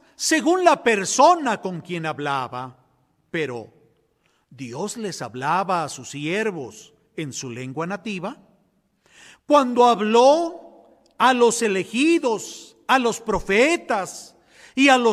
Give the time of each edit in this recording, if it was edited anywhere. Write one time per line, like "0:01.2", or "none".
none